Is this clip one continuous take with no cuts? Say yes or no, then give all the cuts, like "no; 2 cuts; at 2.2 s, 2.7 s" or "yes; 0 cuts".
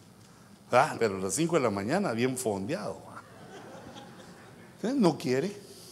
no; 1 cut; at 0.9 s